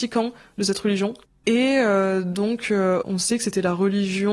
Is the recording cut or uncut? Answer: cut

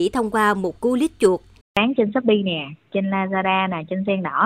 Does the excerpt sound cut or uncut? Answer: cut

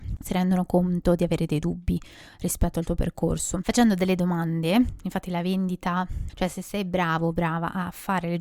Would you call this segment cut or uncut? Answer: cut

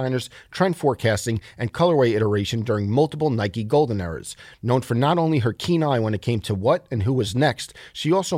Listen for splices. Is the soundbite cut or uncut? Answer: uncut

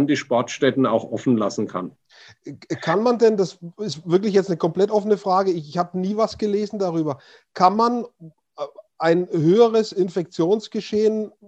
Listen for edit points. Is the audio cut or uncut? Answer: uncut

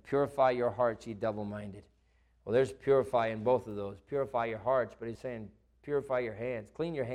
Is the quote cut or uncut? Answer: cut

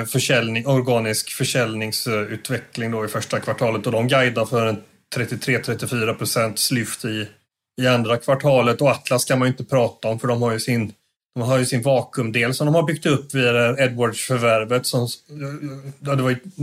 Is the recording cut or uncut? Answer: uncut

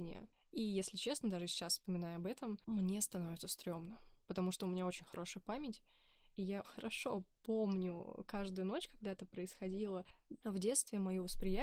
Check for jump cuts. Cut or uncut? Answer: cut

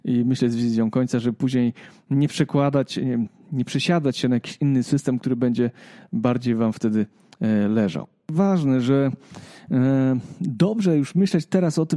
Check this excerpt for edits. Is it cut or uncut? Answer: uncut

